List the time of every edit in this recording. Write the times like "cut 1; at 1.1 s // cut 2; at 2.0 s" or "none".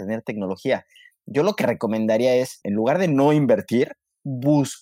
cut 1; at 2.6 s